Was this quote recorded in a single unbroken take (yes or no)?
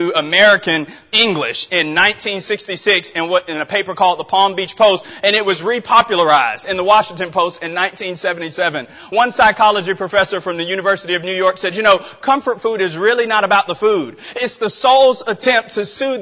yes